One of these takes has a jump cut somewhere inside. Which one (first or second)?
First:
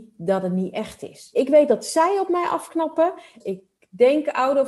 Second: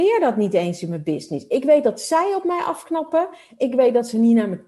first